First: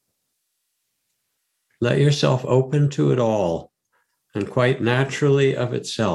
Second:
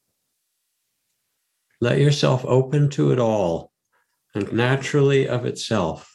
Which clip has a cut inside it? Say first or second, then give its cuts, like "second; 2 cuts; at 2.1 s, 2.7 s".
second; 1 cut; at 4.5 s